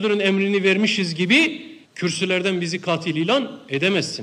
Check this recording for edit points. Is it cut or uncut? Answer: cut